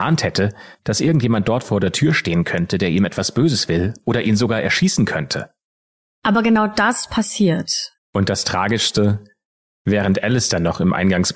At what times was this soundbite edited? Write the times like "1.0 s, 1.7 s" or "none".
8.0 s